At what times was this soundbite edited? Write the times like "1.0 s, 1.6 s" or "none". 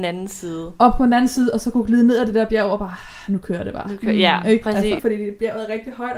5.0 s